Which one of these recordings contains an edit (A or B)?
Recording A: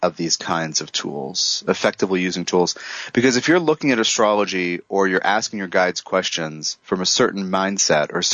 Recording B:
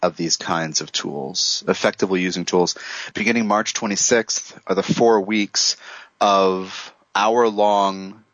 B